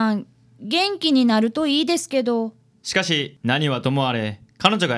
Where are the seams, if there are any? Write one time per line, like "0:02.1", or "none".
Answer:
0:02.7